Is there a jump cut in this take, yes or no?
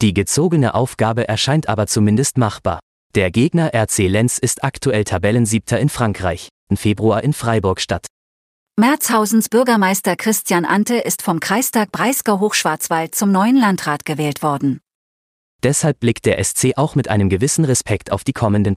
yes